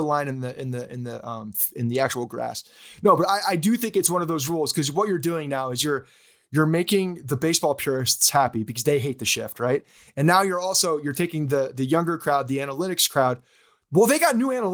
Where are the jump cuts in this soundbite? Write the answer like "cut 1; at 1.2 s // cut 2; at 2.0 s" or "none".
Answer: none